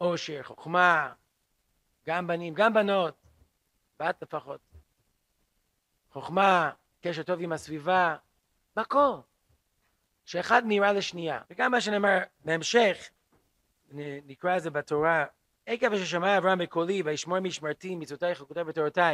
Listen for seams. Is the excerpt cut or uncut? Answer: cut